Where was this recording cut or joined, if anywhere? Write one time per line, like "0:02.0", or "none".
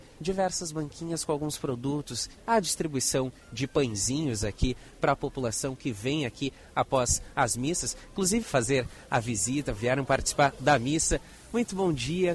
0:02.4
0:08.4